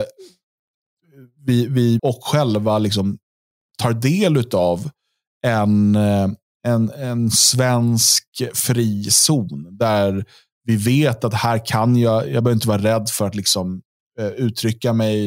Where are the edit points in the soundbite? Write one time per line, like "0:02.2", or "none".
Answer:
0:02.0